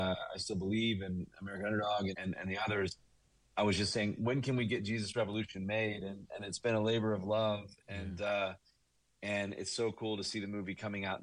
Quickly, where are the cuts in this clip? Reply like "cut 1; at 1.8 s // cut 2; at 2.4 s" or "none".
cut 1; at 2.1 s